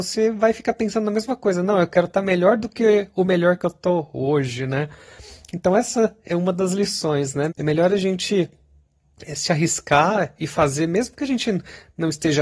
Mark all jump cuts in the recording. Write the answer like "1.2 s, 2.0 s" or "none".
7.5 s